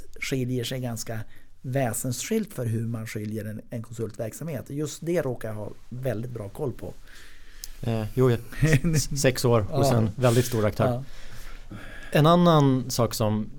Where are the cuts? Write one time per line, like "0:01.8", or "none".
none